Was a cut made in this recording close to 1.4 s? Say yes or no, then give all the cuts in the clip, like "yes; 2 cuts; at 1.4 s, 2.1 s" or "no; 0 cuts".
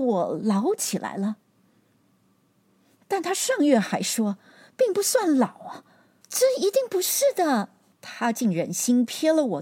no; 2 cuts; at 6.2 s, 7.9 s